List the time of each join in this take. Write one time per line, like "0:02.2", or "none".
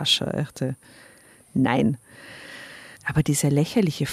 0:03.0